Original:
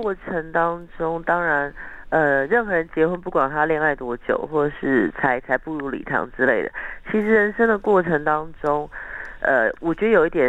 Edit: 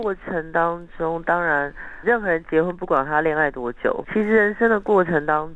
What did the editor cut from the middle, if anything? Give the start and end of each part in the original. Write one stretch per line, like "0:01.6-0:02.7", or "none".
0:02.0-0:02.5
0:04.5-0:07.0